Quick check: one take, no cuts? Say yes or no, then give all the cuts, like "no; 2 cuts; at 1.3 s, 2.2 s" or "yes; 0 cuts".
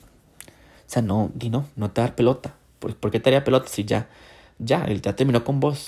yes; 0 cuts